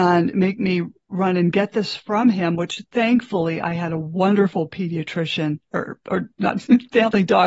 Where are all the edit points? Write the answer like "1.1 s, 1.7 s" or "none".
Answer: none